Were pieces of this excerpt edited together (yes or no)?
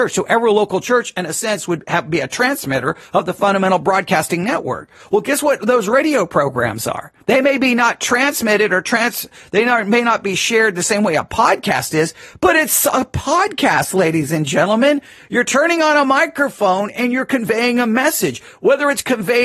yes